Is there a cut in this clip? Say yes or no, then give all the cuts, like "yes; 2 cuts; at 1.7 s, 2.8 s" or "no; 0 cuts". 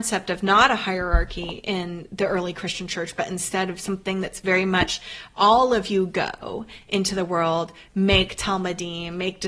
no; 0 cuts